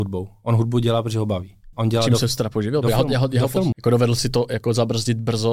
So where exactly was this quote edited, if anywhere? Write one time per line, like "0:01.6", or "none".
0:01.7
0:03.7